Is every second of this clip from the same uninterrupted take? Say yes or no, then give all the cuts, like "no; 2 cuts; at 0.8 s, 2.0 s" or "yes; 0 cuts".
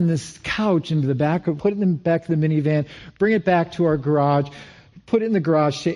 no; 1 cut; at 1.6 s